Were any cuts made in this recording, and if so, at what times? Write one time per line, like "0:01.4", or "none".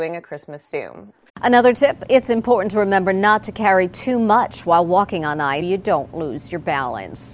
0:01.3
0:05.6